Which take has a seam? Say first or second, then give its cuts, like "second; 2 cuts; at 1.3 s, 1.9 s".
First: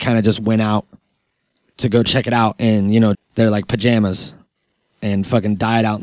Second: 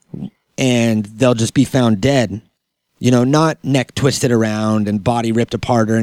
first; 1 cut; at 3.1 s